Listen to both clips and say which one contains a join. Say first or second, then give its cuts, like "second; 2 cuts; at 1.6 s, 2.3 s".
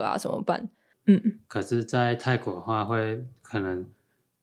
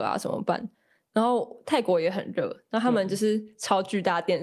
first; 1 cut; at 0.9 s